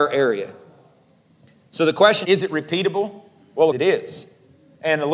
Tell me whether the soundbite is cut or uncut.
cut